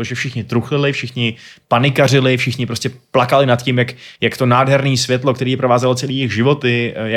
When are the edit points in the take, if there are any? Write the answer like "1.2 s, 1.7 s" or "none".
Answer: none